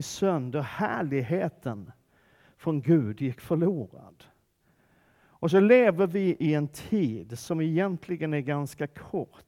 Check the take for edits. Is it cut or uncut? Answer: uncut